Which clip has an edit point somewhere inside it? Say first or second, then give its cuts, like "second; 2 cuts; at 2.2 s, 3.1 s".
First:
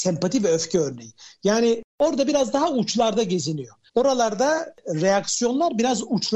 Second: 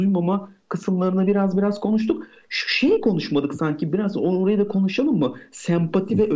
first; 1 cut; at 3.9 s